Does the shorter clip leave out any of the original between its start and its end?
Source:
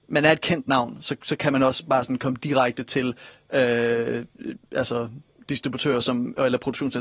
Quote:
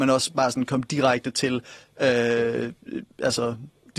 no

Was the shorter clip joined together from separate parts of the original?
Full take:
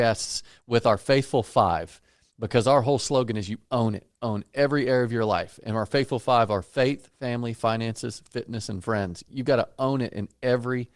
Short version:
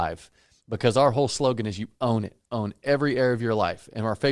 no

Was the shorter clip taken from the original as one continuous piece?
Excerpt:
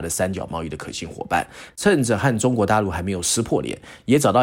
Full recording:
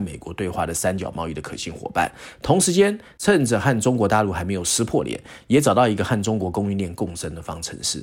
no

